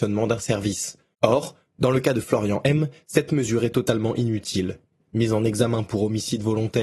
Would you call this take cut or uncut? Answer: uncut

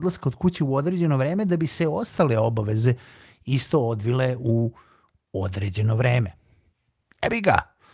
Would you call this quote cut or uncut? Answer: uncut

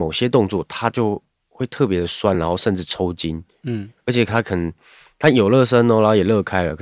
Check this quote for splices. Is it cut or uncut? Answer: uncut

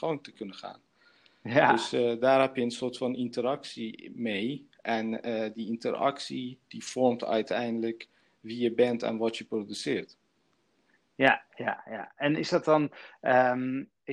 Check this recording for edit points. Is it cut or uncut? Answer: uncut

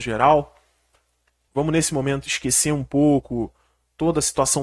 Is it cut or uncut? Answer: cut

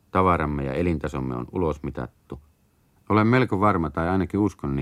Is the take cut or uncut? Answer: cut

